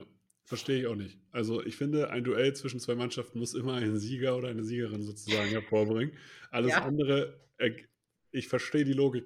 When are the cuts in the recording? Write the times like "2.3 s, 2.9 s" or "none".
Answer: none

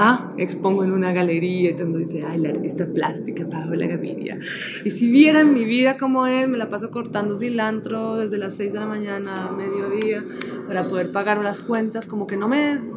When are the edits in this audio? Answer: none

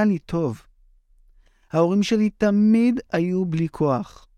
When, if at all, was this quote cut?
none

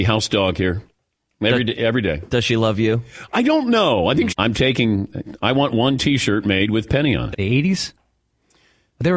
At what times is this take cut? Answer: 4.3 s, 7.3 s

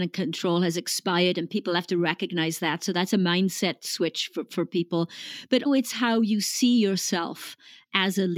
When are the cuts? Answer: 5.7 s

